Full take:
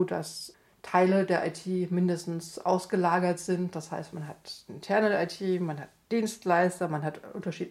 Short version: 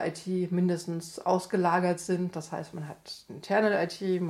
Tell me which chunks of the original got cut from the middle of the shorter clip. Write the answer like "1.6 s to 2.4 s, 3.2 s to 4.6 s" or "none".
none